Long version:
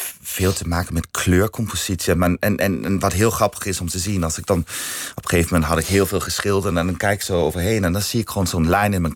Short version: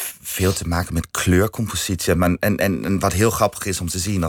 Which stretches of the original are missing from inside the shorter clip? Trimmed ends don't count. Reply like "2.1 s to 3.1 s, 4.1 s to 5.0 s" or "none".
none